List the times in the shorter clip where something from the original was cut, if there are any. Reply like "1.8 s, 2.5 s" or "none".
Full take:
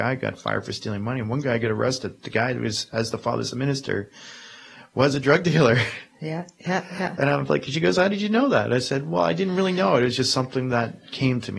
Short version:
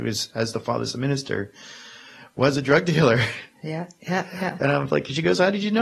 none